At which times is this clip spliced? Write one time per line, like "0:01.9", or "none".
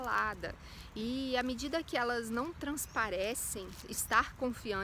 0:03.8